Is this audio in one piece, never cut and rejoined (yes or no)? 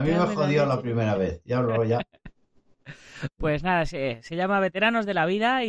yes